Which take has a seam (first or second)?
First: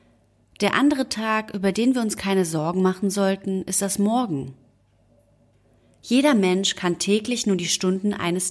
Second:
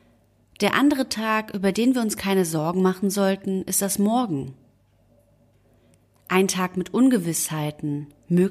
first